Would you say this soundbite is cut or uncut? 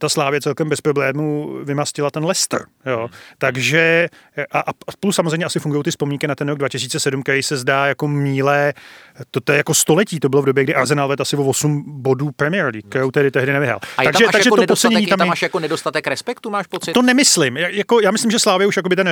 uncut